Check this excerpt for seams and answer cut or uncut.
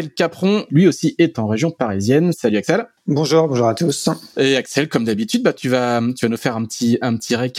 uncut